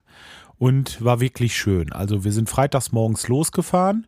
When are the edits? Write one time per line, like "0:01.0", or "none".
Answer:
none